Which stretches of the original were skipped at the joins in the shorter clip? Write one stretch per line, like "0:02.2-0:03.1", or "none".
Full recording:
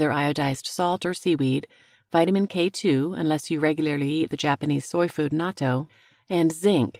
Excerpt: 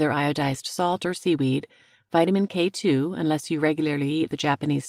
none